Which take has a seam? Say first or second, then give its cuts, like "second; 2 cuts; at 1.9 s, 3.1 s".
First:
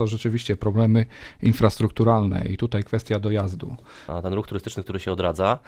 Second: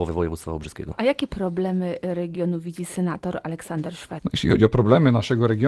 first; 1 cut; at 4.1 s